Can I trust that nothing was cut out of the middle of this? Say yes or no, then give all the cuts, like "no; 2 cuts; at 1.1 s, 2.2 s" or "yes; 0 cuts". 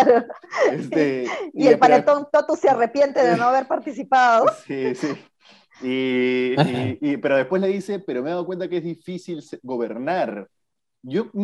yes; 0 cuts